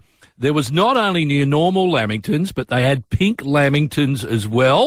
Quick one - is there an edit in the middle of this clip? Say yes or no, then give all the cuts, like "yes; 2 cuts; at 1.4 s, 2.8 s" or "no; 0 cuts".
no; 0 cuts